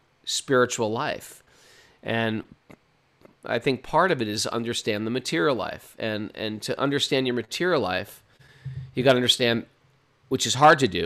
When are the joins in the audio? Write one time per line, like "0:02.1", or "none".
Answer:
none